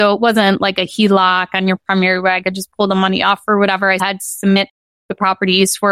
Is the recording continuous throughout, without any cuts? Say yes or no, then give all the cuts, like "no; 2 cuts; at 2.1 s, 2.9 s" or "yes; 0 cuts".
no; 1 cut; at 4.0 s